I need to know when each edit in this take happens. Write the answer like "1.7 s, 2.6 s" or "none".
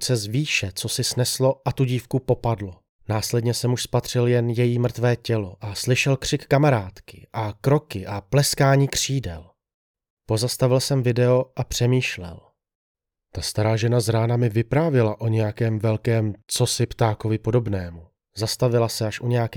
2.9 s, 10.1 s, 18.2 s